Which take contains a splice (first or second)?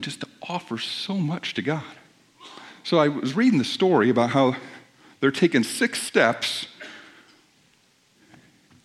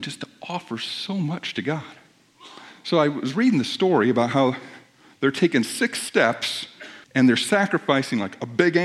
second